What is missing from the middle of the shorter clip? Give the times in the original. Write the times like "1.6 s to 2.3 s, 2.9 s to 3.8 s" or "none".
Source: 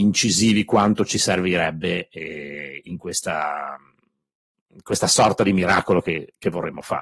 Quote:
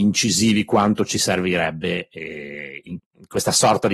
3.0 s to 4.5 s